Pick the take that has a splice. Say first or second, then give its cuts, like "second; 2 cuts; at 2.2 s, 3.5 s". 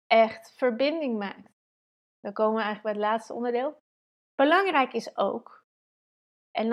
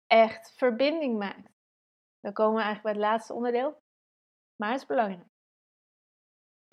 first; 1 cut; at 4.2 s